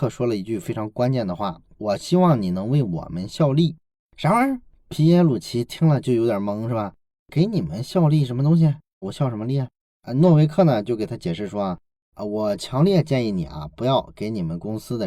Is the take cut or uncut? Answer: cut